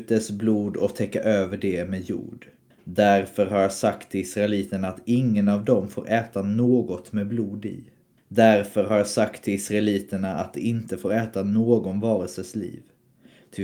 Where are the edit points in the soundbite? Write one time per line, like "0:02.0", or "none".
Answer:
0:02.7
0:08.2